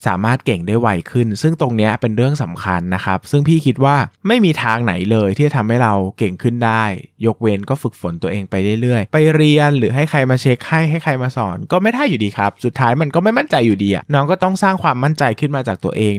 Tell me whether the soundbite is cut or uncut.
cut